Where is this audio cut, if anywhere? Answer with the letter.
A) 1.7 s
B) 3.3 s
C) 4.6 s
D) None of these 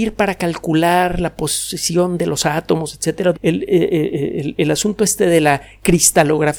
B